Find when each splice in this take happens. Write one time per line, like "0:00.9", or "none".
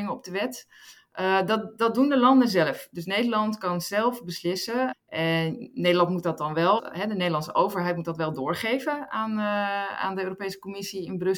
0:04.9
0:06.8